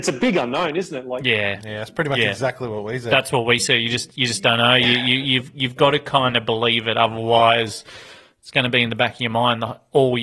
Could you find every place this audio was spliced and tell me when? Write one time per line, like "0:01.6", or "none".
0:01.6